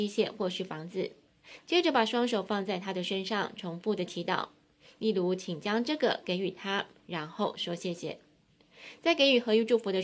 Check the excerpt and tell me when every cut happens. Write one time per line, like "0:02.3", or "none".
0:01.6